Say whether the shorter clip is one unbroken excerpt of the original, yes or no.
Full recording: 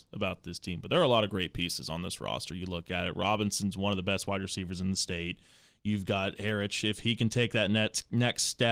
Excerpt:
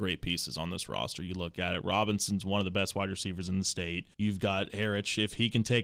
no